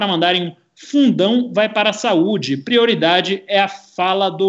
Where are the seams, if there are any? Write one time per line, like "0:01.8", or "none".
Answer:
none

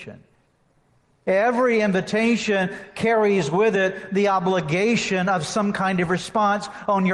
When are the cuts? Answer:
none

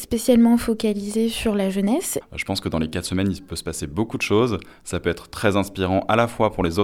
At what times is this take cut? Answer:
0:02.2

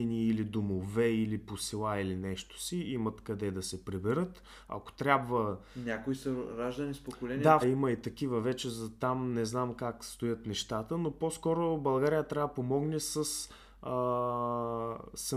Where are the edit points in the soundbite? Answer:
0:07.6

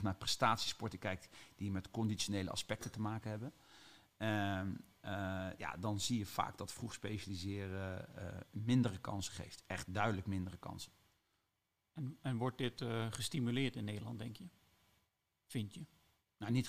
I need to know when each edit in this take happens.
none

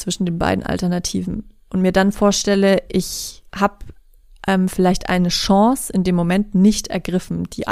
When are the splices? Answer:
0:03.5

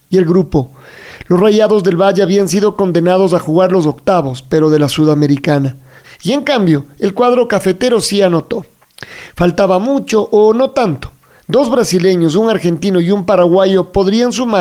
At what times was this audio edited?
0:06.0
0:11.4

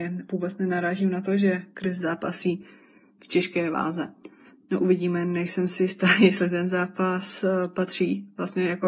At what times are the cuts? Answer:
none

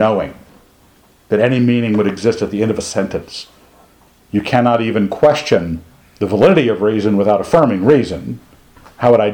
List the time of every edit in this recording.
0:04.2
0:06.0

